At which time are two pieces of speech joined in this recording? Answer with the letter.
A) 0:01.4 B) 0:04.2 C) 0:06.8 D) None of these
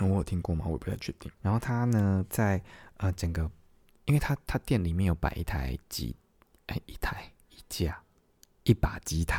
A